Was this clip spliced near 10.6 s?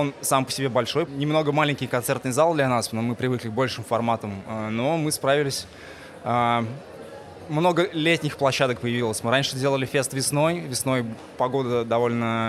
no; 1 cut; at 1.1 s

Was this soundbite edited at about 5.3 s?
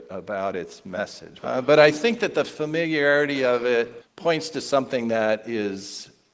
no; 2 cuts; at 1.4 s, 4.0 s

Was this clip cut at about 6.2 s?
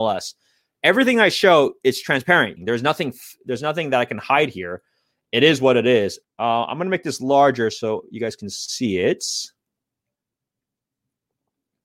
yes; 2 cuts; at 2.6 s, 6.2 s

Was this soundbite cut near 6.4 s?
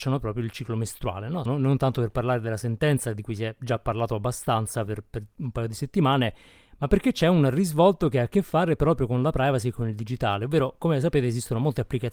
no; 1 cut; at 1.5 s

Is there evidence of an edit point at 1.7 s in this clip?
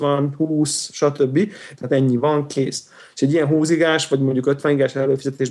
yes; 1 cut; at 1.7 s

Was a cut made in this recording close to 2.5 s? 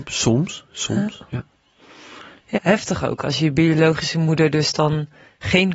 yes; 1 cut; at 2.5 s

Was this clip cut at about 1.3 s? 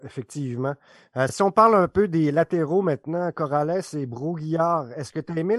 no; 0 cuts

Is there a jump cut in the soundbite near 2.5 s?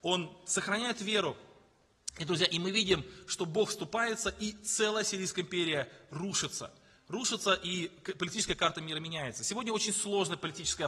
no; 0 cuts

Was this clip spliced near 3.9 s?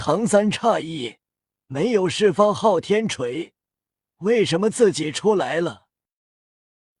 no; 0 cuts

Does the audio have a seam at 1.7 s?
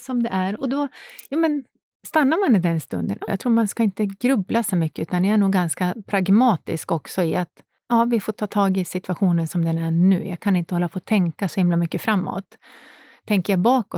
no; 1 cut; at 3.3 s

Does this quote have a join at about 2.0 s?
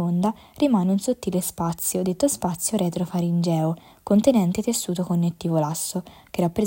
no; 0 cuts

